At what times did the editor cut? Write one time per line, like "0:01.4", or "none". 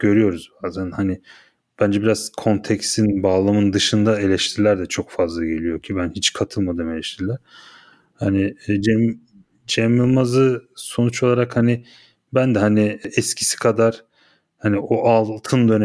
none